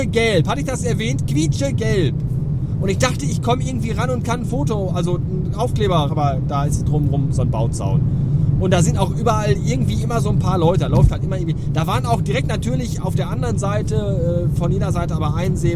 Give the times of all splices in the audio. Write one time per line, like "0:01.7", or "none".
0:06.1